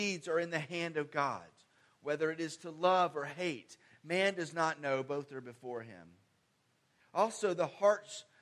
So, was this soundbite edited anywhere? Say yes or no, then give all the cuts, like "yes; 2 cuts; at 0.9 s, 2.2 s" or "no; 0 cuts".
yes; 1 cut; at 7.0 s